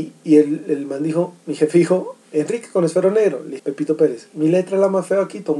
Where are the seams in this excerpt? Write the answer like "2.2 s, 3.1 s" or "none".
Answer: 3.6 s